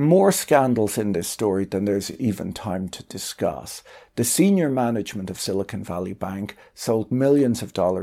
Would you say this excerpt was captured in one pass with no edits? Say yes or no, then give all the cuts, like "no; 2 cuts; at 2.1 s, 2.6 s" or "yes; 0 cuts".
yes; 0 cuts